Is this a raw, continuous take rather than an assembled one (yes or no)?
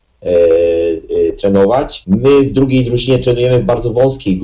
no